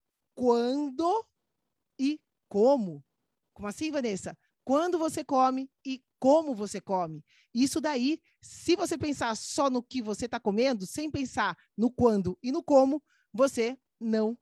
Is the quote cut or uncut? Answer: uncut